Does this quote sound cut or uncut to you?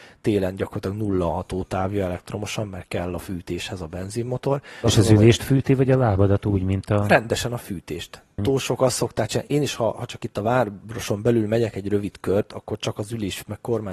cut